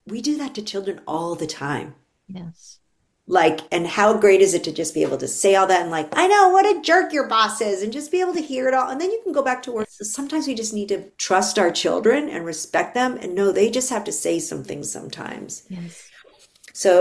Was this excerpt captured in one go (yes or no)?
no